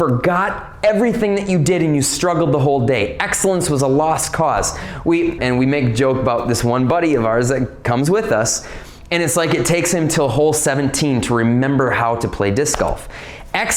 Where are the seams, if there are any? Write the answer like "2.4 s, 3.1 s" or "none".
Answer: 5.4 s